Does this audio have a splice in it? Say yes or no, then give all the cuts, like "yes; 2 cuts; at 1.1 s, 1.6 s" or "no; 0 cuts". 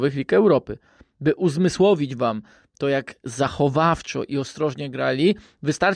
no; 0 cuts